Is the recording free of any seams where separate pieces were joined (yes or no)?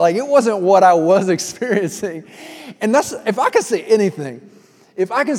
yes